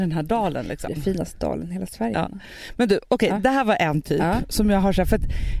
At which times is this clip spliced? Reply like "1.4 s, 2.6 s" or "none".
none